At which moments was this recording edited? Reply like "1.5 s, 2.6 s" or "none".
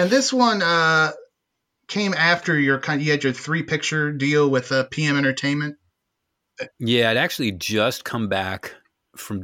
none

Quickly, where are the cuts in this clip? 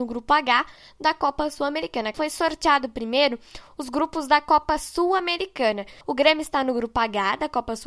2.1 s, 6.0 s

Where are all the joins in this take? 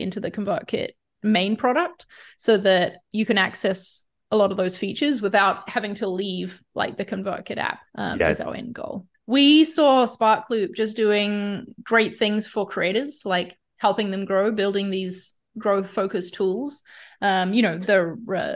7.9 s, 9.1 s

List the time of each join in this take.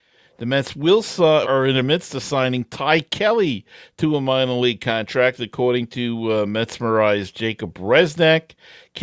1.4 s

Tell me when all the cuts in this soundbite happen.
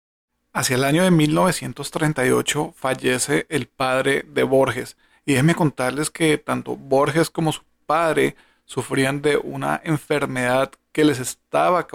none

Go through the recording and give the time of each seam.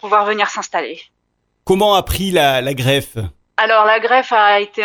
none

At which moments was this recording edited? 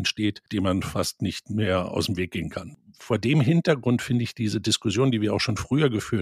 none

